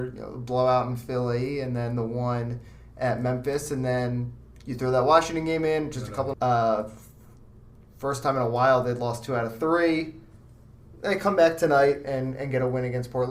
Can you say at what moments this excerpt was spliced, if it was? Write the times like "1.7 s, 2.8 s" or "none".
6.3 s